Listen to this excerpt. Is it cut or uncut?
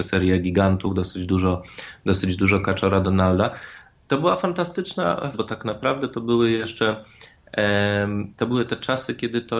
cut